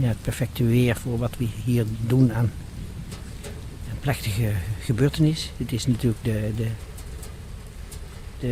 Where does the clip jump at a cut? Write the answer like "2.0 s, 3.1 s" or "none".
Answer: none